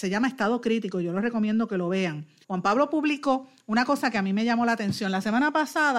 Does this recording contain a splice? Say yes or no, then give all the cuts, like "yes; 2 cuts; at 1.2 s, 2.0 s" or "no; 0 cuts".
yes; 1 cut; at 2.4 s